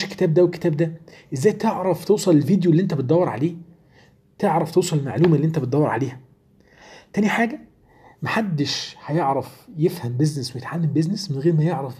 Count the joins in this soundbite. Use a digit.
0